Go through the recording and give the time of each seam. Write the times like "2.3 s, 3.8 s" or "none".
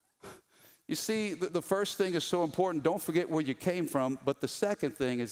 1.5 s